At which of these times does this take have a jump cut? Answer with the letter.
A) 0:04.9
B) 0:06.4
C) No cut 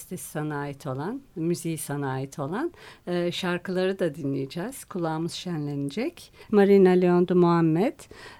B